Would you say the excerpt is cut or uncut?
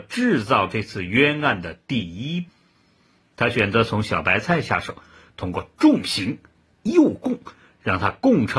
uncut